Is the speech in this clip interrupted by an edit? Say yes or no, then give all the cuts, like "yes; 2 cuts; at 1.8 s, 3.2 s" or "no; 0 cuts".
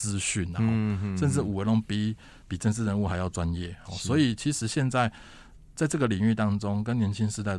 no; 0 cuts